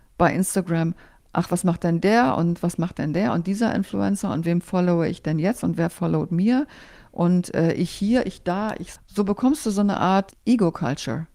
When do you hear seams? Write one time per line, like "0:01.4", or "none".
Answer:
0:09.0